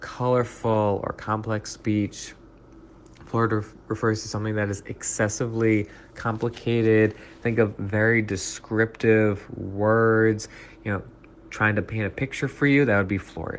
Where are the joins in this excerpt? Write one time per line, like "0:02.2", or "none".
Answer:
none